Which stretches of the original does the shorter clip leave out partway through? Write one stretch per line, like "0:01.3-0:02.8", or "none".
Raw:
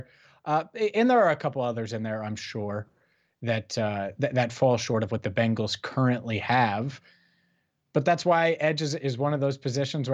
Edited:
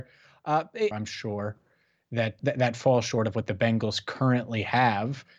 0:00.9-0:02.2
0:03.7-0:04.2